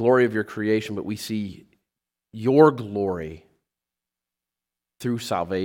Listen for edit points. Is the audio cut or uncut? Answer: uncut